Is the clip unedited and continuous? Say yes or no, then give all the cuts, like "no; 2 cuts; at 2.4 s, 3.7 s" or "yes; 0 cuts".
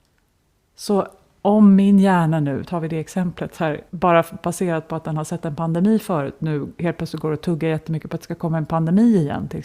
no; 2 cuts; at 2.6 s, 3.9 s